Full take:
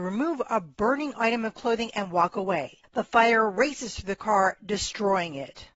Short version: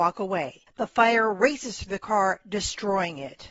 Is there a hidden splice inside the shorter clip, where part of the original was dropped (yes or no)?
no